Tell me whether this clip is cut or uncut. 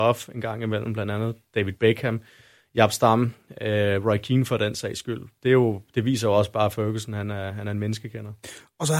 uncut